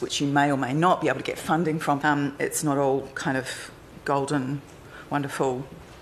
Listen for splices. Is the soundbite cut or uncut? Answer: cut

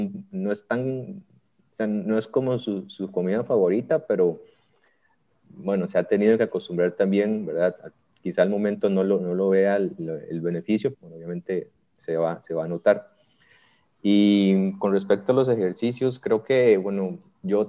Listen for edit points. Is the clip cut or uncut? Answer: cut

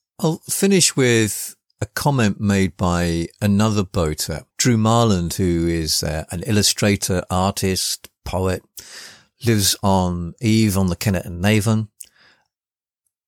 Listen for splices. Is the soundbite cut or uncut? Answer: cut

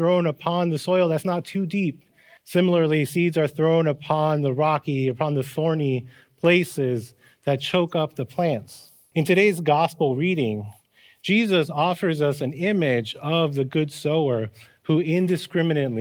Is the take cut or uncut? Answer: cut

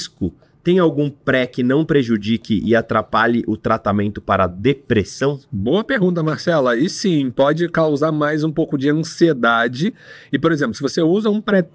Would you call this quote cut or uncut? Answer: uncut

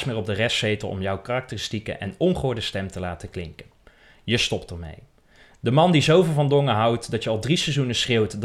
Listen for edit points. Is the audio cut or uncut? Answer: uncut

